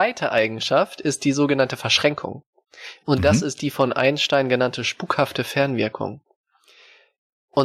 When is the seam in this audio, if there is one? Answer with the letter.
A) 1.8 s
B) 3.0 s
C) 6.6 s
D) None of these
D